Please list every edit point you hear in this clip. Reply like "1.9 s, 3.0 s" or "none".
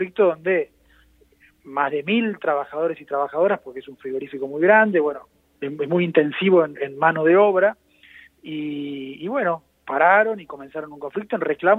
5.5 s